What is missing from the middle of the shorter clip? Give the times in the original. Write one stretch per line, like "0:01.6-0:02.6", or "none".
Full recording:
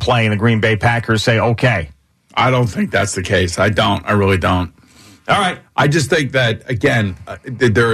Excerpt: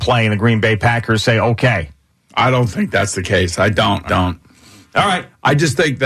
0:04.1-0:04.4